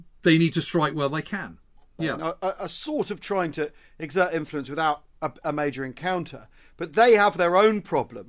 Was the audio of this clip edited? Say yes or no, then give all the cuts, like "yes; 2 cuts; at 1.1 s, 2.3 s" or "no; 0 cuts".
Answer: yes; 1 cut; at 2.0 s